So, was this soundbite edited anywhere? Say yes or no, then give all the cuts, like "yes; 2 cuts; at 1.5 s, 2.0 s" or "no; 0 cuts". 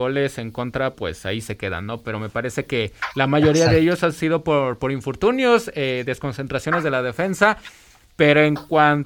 no; 0 cuts